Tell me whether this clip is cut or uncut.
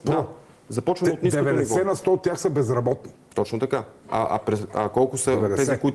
uncut